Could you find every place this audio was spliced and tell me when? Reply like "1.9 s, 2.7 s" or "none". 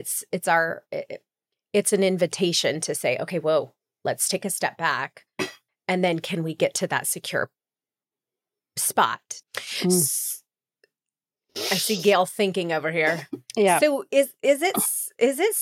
5.7 s, 9.4 s